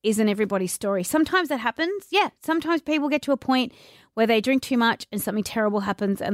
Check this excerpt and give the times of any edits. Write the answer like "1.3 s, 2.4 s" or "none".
none